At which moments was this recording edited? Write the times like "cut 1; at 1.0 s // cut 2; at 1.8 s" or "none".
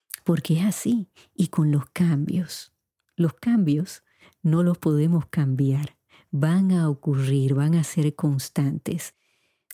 cut 1; at 3.0 s